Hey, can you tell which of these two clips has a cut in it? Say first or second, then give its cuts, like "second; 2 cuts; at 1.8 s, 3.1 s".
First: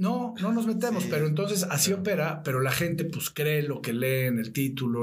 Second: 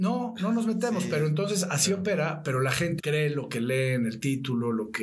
second; 1 cut; at 3.0 s